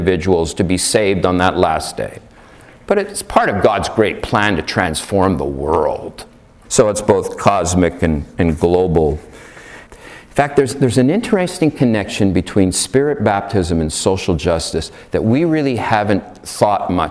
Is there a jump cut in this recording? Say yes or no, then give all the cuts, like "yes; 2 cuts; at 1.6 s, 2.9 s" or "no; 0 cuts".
yes; 2 cuts; at 6.7 s, 9.9 s